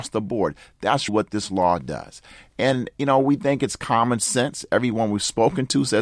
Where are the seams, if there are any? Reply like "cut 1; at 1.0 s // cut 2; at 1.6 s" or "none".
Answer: cut 1; at 1.1 s